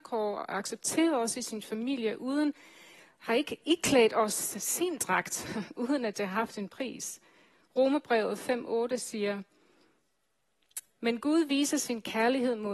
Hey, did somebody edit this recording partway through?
no; 0 cuts

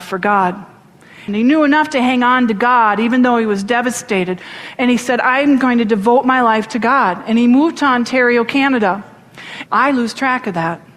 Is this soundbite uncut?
no; 2 cuts; at 1.3 s, 9.7 s

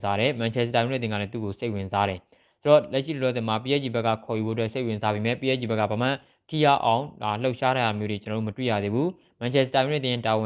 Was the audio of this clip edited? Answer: no; 0 cuts

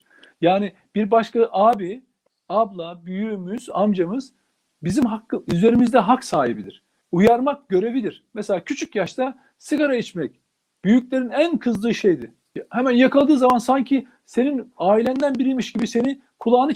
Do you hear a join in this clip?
yes; 1 cut; at 7.0 s

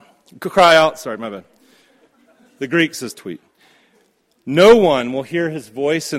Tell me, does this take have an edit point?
no; 0 cuts

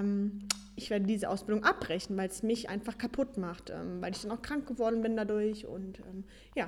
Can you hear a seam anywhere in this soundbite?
no; 0 cuts

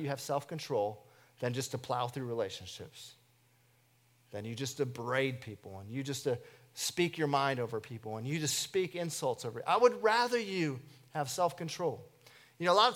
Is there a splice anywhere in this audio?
no; 0 cuts

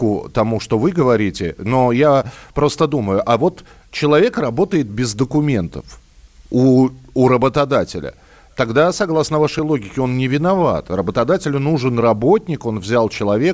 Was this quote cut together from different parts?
no; 0 cuts

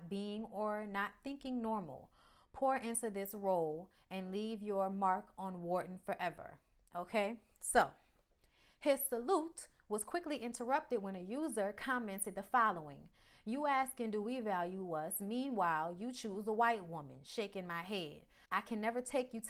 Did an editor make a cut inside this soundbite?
no; 0 cuts

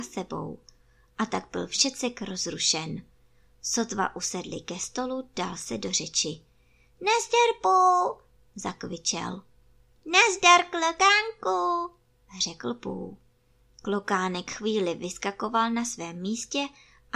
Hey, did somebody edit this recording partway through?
no; 0 cuts

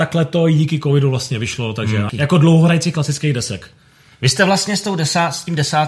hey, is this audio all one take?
no; 1 cut; at 2.1 s

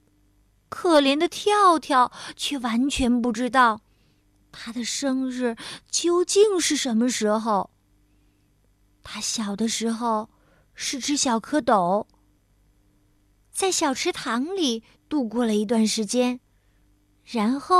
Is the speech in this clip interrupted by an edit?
no; 0 cuts

